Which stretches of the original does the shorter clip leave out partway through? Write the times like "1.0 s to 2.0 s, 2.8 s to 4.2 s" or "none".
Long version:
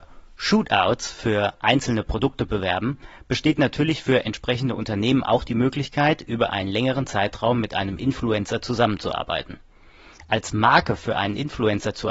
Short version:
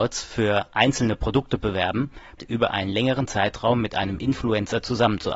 3.2 s to 6.2 s

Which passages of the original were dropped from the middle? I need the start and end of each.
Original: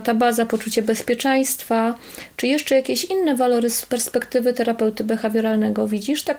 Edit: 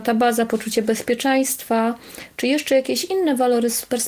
none

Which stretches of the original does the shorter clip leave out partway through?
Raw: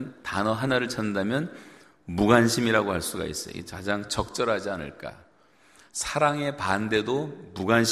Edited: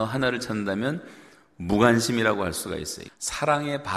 3.5 s to 5.8 s

